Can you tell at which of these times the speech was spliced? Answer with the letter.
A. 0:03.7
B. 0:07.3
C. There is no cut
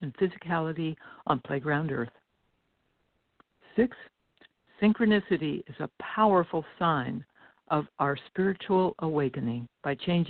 C